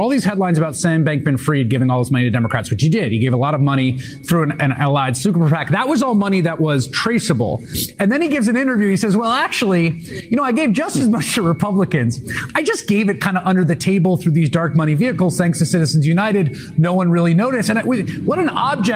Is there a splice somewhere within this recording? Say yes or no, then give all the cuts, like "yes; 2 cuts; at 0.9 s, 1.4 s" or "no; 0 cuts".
no; 0 cuts